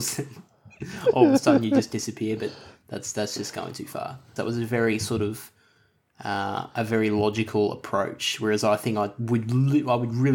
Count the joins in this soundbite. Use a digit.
1